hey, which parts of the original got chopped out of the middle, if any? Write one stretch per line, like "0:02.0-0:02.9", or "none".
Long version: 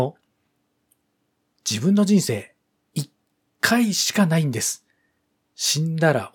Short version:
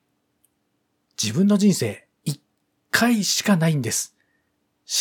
0:02.6-0:02.9

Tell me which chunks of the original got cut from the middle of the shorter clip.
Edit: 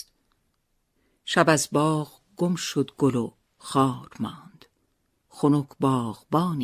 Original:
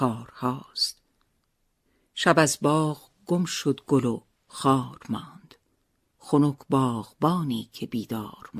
none

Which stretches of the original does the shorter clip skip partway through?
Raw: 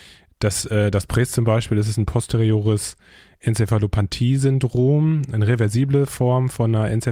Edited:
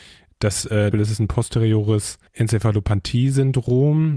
0:00.9-0:01.7
0:03.0-0:03.3

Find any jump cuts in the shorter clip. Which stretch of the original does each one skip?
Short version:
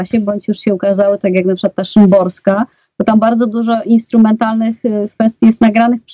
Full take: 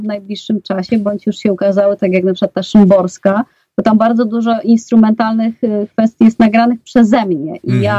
none

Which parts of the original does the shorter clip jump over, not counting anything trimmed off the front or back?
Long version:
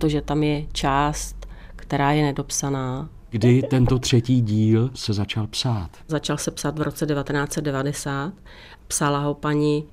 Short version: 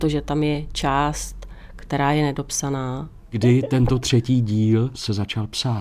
none

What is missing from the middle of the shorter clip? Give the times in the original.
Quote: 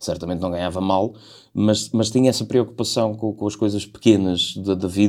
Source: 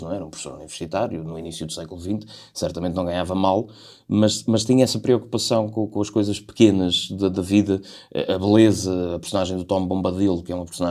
none

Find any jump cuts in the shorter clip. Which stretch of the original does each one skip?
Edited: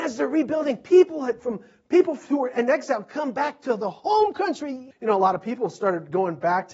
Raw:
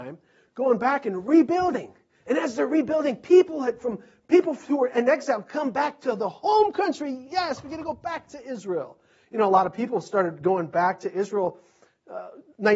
0:07.3-0:09.2

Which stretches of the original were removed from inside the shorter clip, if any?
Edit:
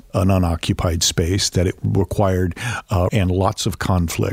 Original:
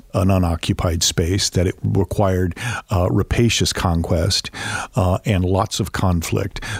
0:03.1-0:05.2

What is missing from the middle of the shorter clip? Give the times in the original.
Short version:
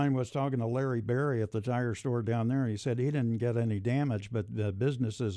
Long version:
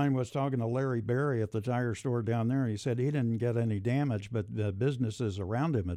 none

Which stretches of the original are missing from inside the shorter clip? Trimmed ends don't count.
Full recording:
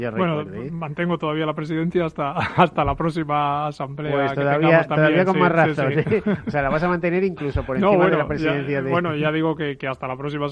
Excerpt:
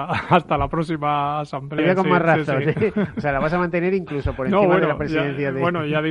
0:04.1-0:05.1

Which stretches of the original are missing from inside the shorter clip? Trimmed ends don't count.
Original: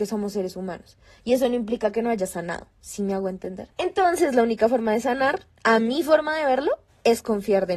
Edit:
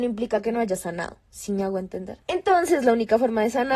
none

